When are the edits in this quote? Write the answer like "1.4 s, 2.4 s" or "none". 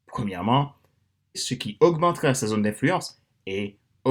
1.3 s